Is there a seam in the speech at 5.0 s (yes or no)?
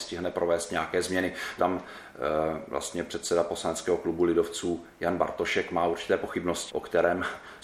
no